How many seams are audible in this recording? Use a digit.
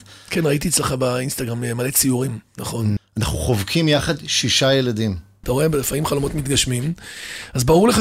2